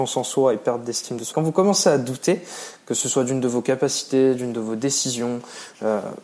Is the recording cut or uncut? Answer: cut